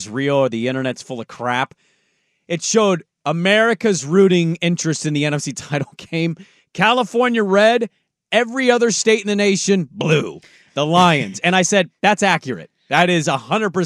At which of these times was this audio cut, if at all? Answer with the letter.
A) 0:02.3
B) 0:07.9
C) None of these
C